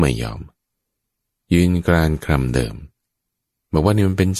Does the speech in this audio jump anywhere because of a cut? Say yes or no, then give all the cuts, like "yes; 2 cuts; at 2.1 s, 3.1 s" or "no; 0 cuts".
no; 0 cuts